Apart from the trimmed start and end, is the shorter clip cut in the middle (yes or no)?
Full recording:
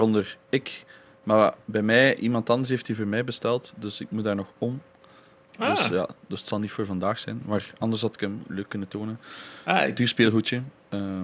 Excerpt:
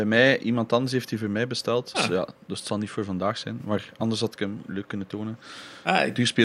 yes